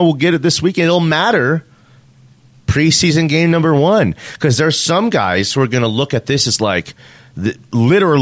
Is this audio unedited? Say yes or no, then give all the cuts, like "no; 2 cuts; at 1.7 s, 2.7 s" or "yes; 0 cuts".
yes; 0 cuts